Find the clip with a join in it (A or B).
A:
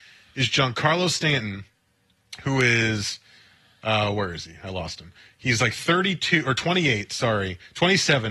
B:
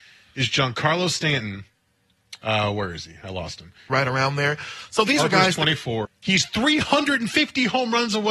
B